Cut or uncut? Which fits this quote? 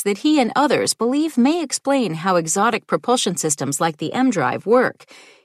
uncut